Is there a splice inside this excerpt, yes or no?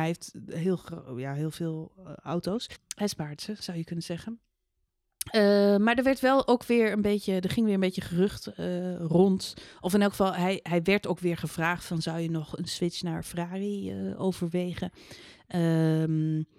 yes